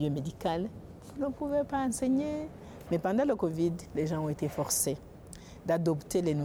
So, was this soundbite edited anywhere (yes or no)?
yes